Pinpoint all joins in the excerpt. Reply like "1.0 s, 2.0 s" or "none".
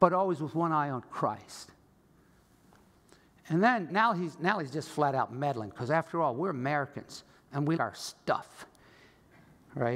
3.9 s, 7.8 s